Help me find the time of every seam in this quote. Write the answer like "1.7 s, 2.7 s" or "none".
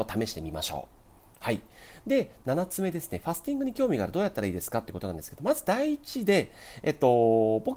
none